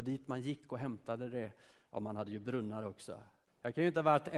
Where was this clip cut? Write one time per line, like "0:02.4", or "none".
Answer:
0:03.5